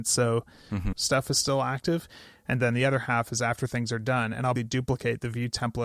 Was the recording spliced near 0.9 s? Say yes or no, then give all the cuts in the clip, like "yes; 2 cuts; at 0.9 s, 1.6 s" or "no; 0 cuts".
yes; 2 cuts; at 0.9 s, 4.6 s